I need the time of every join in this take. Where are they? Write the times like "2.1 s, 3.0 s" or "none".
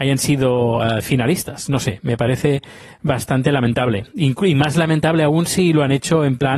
none